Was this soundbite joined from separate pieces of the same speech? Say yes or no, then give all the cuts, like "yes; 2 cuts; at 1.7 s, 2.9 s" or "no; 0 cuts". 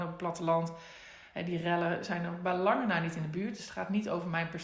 no; 0 cuts